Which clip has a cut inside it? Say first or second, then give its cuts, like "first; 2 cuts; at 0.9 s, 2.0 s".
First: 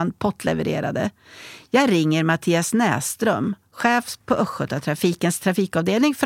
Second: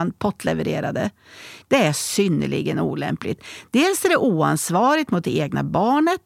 second; 1 cut; at 1.6 s